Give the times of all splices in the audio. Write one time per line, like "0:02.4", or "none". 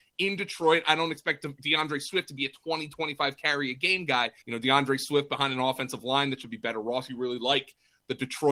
0:04.4